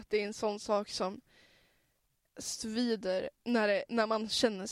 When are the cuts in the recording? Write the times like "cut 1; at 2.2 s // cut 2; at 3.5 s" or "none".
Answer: cut 1; at 3.4 s